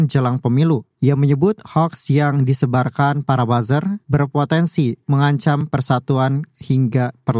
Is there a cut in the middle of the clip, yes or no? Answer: no